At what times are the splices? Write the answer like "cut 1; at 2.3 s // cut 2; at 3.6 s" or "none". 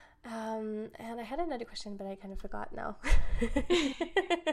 none